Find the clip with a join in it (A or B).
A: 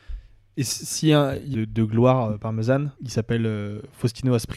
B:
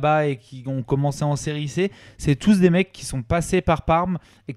A